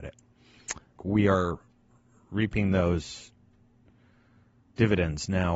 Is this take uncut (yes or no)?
no